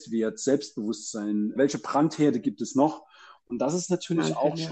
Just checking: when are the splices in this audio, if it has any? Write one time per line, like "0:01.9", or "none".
0:01.6
0:03.4